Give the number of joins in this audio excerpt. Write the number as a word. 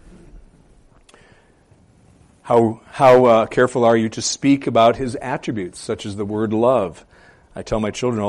zero